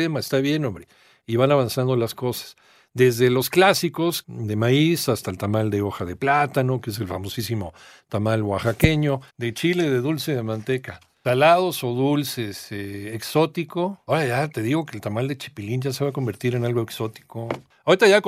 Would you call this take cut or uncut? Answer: cut